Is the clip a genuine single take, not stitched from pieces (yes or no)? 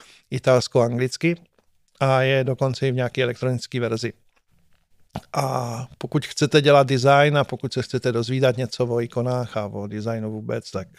yes